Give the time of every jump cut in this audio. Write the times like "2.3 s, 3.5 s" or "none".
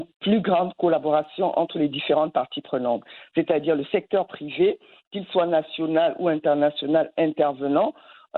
none